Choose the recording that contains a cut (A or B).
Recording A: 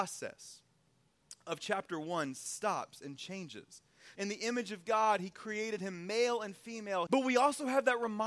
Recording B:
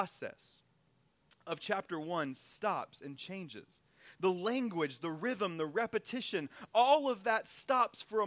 A